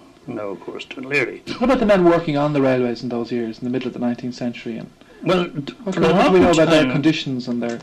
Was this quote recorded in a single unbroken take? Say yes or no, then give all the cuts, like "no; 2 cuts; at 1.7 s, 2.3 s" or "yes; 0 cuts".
yes; 0 cuts